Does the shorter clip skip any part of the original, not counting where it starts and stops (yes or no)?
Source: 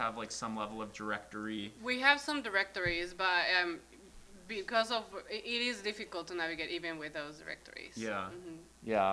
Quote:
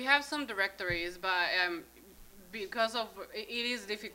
no